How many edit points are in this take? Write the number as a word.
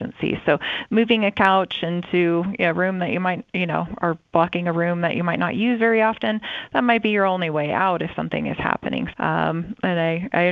one